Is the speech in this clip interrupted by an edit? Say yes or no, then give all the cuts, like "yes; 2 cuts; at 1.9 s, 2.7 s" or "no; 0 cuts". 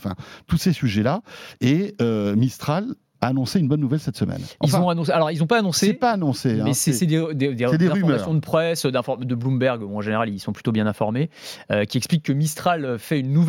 no; 0 cuts